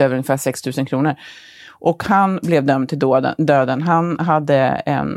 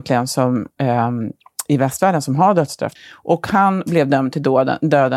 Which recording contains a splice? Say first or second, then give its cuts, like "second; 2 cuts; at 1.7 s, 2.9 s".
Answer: second; 1 cut; at 3.0 s